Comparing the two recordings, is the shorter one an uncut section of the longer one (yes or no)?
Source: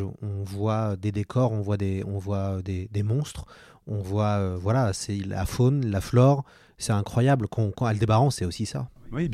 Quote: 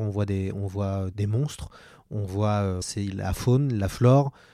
no